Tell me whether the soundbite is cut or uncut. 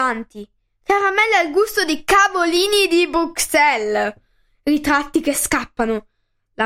uncut